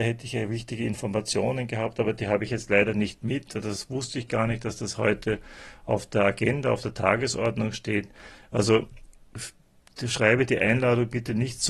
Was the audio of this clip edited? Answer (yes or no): no